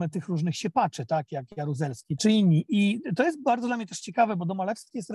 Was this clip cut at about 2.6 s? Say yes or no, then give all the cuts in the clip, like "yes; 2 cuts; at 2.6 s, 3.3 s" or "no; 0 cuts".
no; 0 cuts